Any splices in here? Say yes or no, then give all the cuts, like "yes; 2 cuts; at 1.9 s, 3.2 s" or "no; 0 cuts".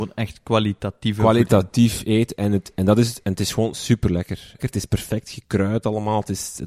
yes; 2 cuts; at 2.7 s, 4.6 s